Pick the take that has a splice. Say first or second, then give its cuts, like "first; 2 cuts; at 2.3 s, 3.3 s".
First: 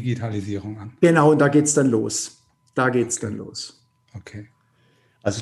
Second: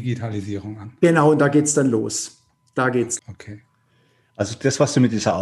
second; 1 cut; at 3.2 s